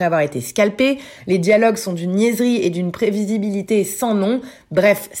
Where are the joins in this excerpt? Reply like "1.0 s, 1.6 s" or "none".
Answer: 1.2 s